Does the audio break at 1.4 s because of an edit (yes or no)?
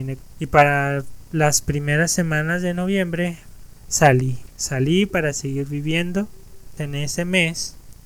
no